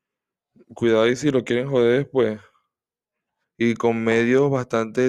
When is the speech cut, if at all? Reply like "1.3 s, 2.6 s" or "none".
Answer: 3.4 s